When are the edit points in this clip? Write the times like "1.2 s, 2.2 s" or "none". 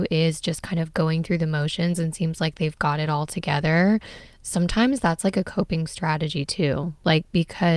none